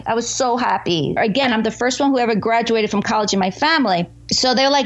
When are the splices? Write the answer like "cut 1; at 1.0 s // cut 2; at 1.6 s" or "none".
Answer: cut 1; at 1.2 s